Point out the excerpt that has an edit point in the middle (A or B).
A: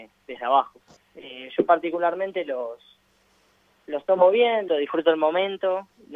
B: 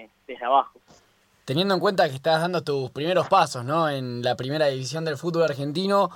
A